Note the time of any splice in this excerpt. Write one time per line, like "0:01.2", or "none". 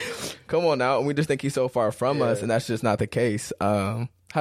none